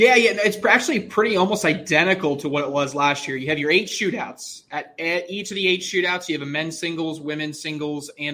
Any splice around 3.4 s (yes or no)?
no